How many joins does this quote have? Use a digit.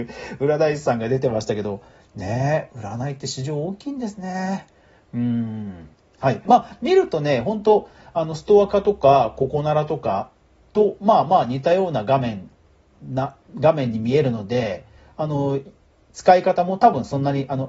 1